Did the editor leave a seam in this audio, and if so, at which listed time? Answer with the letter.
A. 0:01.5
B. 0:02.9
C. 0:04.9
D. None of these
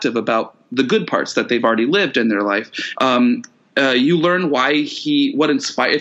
B